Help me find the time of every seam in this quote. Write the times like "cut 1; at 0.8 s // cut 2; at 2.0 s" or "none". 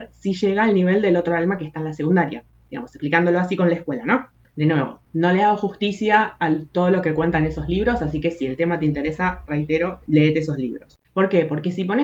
cut 1; at 11.0 s